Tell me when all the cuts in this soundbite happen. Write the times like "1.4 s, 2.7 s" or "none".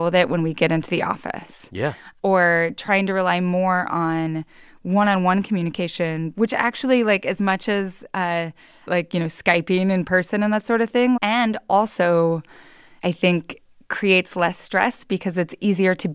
8.9 s, 11.2 s